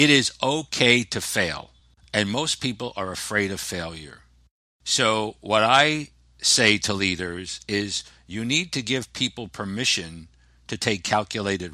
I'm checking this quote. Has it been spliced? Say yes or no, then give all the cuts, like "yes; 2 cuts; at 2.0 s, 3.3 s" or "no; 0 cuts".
no; 0 cuts